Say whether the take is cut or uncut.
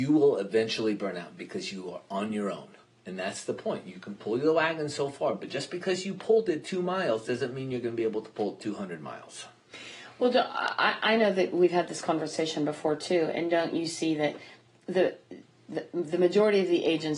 uncut